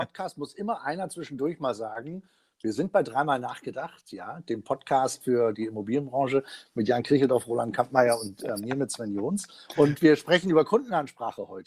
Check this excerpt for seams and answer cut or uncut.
uncut